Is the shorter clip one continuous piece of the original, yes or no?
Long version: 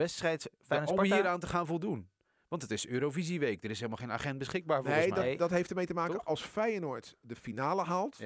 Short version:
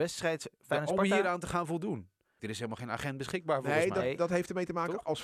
no